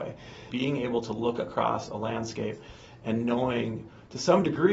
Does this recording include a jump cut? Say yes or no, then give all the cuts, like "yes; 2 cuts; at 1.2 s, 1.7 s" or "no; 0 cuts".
no; 0 cuts